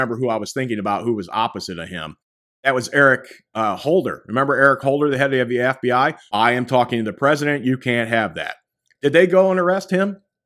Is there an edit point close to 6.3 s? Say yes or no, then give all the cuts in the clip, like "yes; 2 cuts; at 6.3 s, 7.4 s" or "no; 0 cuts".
yes; 1 cut; at 6.3 s